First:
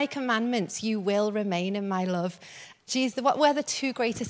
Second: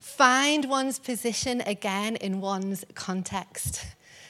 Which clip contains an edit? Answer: first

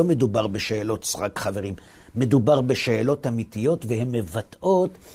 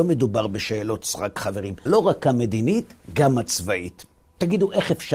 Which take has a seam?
second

